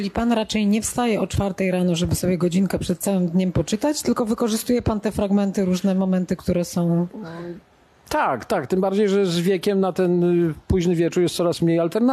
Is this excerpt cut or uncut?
uncut